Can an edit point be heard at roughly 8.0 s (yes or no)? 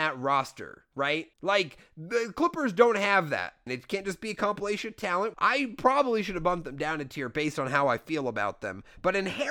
no